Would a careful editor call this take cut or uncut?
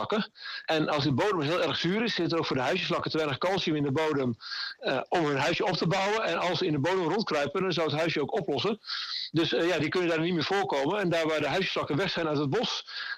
uncut